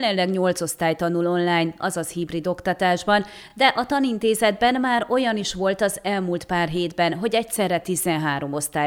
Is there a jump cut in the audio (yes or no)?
no